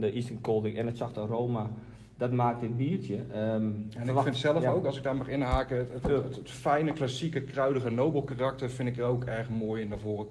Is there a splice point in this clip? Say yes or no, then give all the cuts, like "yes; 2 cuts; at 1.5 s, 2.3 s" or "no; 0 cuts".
no; 0 cuts